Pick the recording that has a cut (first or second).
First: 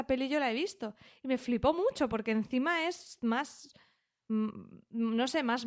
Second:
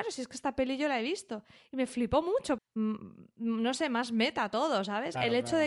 second